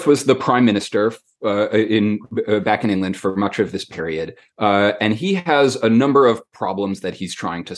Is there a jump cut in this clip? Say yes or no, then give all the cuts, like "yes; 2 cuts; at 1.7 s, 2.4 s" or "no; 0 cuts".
no; 0 cuts